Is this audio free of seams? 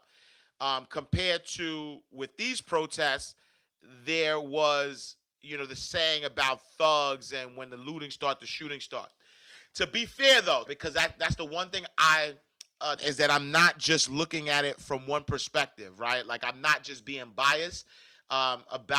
no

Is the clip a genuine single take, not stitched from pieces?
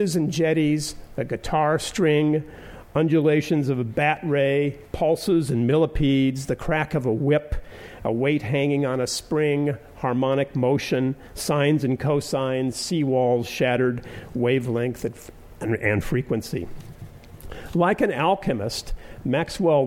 yes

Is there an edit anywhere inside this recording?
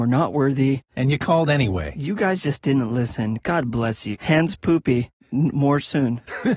yes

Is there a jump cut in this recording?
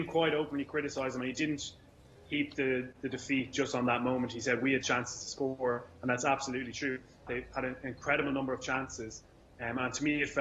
yes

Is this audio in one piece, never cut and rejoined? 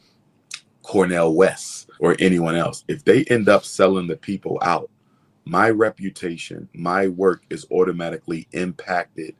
no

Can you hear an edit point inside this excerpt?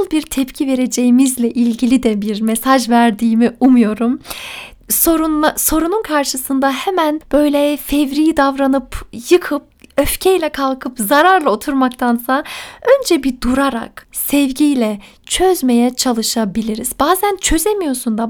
yes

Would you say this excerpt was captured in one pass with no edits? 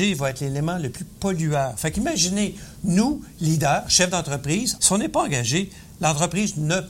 no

